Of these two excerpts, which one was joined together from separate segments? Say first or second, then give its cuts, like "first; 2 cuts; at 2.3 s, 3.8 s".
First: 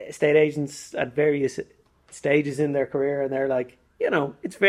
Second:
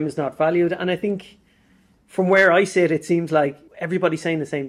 second; 1 cut; at 3.7 s